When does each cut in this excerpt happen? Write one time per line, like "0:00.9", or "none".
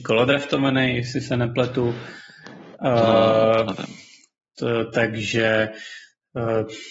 none